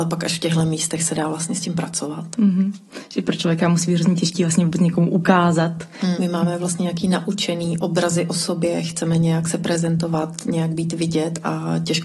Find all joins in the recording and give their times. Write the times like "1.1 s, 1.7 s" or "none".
6.2 s

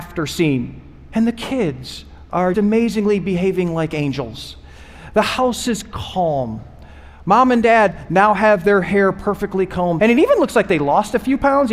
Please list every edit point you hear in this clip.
2.5 s, 10.0 s

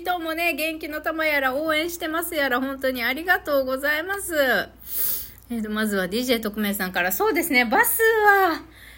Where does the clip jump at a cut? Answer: none

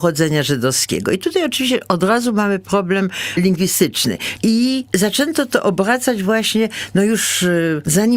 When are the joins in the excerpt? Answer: 4.4 s

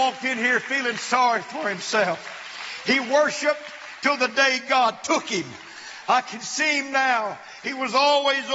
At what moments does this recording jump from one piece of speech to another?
none

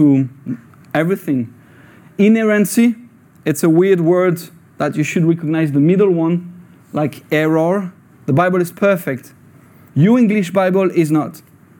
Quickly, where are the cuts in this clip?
8.1 s, 9.9 s

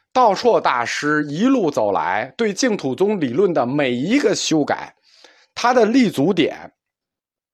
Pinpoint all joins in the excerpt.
none

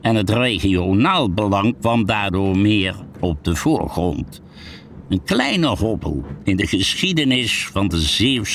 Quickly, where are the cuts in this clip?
5.0 s

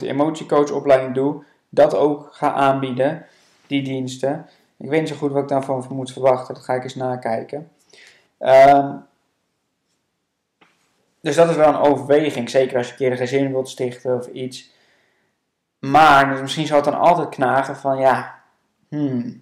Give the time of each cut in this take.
8.3 s

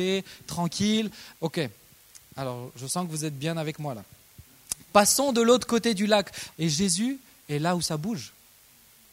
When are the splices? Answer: 1.3 s, 6.5 s

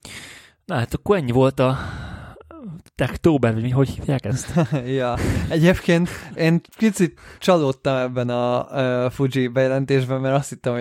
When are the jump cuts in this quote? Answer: none

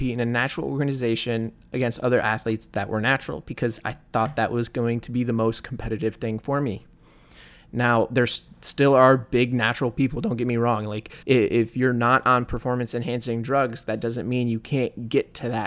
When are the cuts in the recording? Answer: 11.2 s

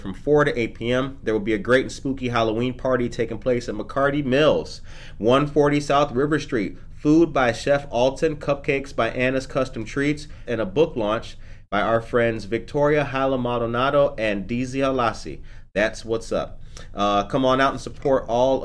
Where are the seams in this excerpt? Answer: 10.5 s

